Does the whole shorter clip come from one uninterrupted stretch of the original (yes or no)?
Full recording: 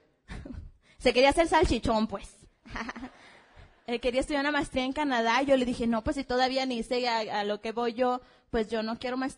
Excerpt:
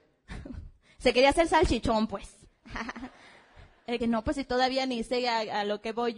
no